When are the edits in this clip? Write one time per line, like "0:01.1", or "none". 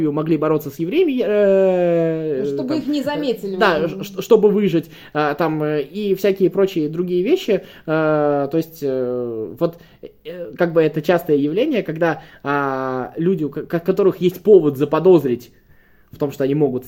none

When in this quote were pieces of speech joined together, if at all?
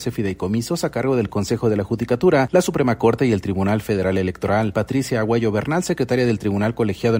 none

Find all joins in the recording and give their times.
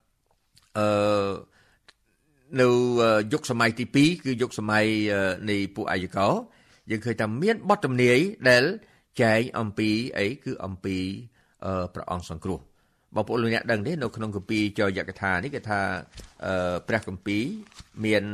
none

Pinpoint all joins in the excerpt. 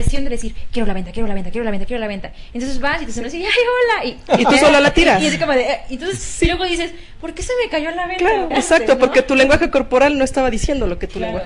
0:08.5

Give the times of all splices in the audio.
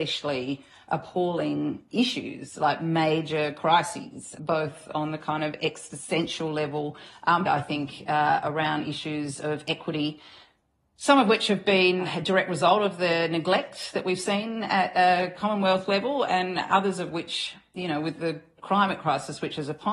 0:04.4
0:07.5
0:18.2

